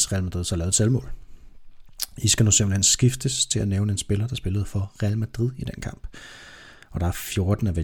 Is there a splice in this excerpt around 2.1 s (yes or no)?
no